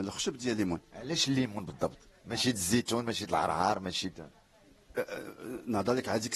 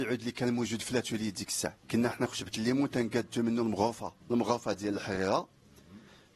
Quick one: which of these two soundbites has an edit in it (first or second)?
second